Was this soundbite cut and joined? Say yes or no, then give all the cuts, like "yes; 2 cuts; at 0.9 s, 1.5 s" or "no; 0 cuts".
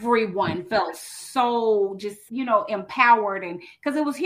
yes; 1 cut; at 2.3 s